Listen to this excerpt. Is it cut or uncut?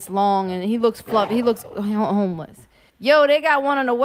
cut